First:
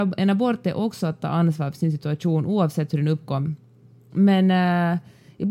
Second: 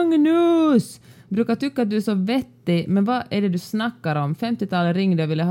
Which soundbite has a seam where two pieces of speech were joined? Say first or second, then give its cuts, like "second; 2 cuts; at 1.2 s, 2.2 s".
first; 1 cut; at 4.1 s